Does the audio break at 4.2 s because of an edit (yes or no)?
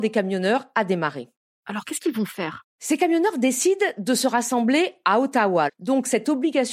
no